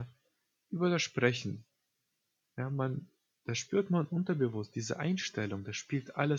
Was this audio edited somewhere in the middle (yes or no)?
no